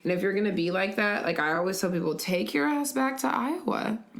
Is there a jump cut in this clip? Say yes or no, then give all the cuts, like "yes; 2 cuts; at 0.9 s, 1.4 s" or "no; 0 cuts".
no; 0 cuts